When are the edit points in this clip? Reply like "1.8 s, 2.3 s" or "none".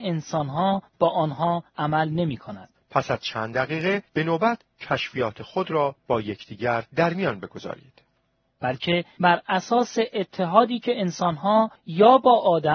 2.7 s, 8.5 s

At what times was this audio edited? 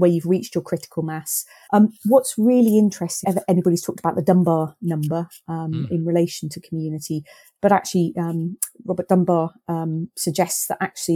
1.7 s, 3.2 s

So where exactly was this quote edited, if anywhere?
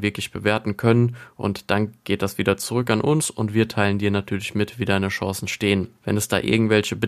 6.0 s

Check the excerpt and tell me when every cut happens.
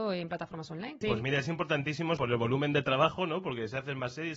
1.0 s, 2.2 s

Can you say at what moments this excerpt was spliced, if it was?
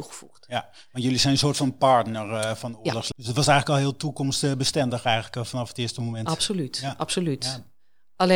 3.1 s

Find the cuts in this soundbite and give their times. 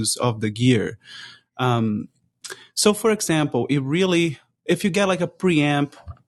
none

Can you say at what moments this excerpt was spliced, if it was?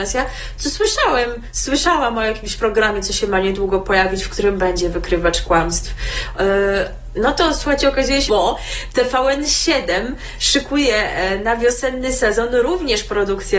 8.3 s

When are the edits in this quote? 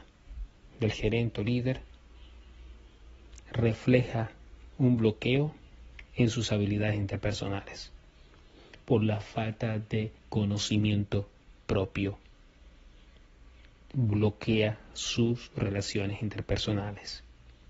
10.2 s

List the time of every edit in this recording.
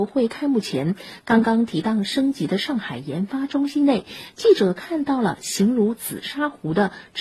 none

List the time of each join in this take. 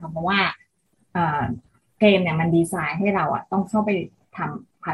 none

